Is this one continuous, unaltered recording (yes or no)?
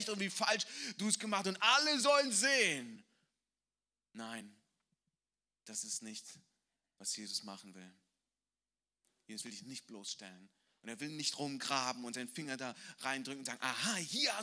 yes